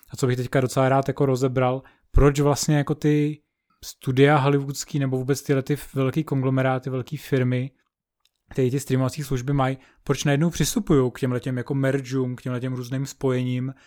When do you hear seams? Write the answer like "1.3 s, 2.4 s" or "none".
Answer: none

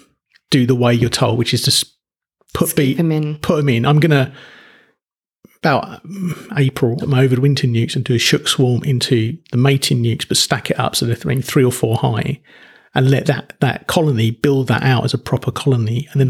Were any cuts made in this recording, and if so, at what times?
7.0 s

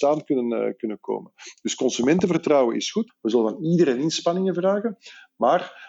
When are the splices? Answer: 3.1 s

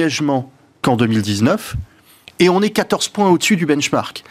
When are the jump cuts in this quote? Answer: none

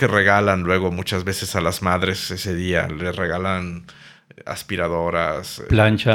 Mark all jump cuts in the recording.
none

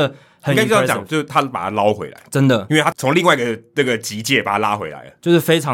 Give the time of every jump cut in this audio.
none

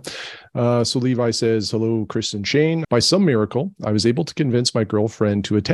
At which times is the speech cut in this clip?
2.8 s

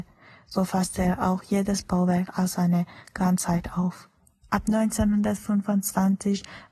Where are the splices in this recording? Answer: 4.4 s

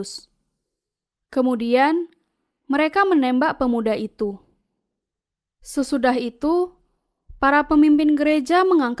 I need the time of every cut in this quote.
1.1 s

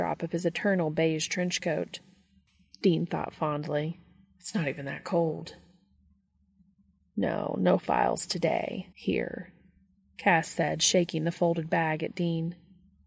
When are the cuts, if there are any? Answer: 8.9 s

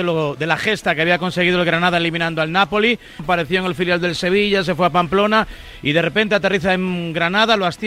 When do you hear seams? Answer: 3.2 s

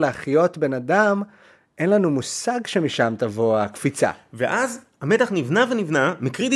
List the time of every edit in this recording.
none

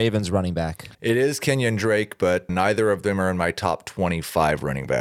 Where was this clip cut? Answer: 0.9 s, 2.5 s

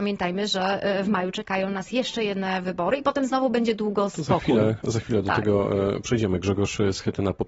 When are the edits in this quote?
none

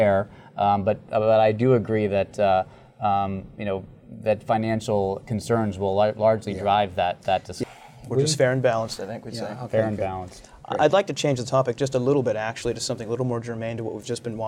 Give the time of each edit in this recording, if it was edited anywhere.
7.6 s

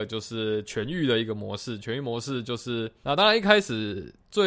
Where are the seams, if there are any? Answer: 3.0 s

